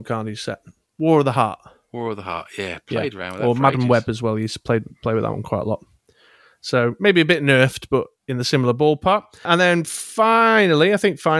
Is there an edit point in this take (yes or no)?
no